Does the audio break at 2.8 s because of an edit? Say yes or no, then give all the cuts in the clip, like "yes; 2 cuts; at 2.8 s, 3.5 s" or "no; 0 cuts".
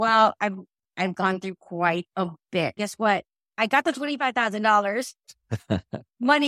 yes; 1 cut; at 2.8 s